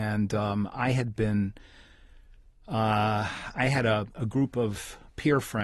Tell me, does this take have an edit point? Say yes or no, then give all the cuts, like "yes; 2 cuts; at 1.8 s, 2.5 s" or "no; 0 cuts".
no; 0 cuts